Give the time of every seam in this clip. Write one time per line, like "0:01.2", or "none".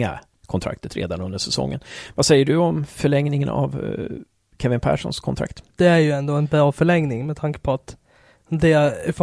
0:05.7